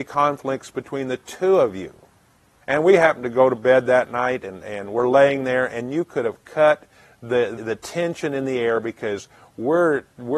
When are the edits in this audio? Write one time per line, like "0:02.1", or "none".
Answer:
0:02.6
0:07.6